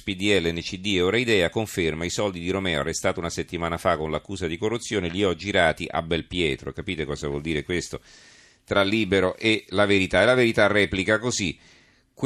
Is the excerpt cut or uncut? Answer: cut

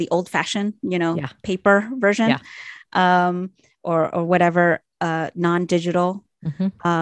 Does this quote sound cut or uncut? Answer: uncut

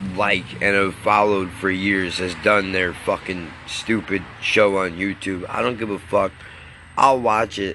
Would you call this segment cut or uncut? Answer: uncut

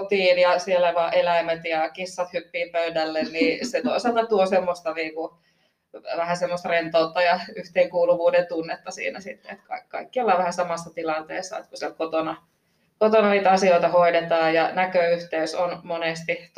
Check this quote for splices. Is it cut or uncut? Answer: uncut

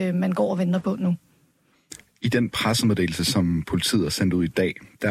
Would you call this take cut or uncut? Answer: uncut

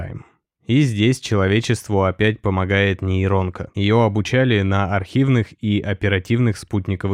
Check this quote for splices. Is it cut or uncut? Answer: uncut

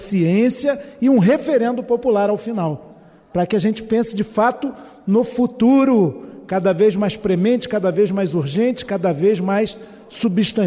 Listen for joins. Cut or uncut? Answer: uncut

